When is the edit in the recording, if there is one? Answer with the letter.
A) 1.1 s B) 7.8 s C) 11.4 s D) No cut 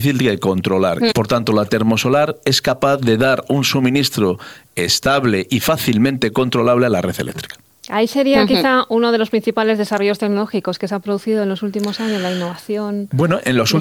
A